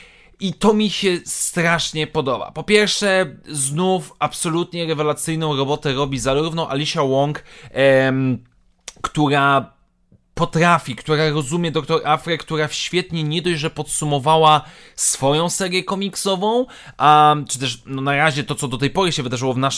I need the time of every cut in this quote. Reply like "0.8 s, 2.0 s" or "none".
none